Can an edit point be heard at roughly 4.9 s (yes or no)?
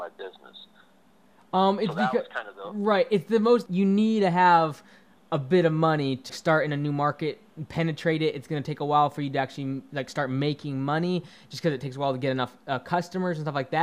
no